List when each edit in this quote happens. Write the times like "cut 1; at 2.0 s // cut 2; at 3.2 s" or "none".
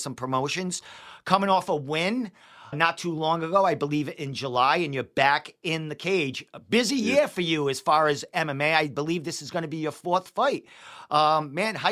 cut 1; at 2.7 s